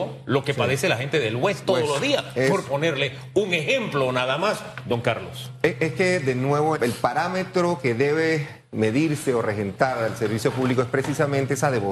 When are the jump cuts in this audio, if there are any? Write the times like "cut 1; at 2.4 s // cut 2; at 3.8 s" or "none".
cut 1; at 6.8 s